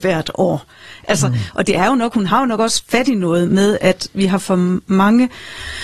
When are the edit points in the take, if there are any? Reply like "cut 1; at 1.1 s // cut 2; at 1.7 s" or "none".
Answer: none